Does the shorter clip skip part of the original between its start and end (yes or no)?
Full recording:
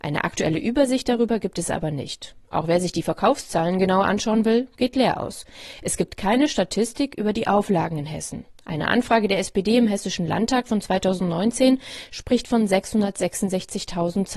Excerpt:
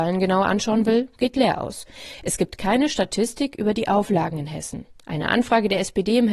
no